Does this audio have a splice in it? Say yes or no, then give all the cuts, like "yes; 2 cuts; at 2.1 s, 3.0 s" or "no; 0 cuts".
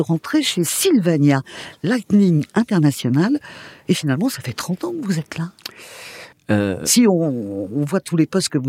yes; 1 cut; at 6.3 s